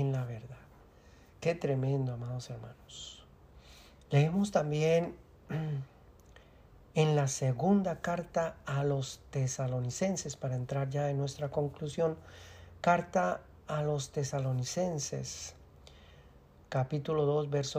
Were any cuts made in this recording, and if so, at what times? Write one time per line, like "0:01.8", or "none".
0:04.0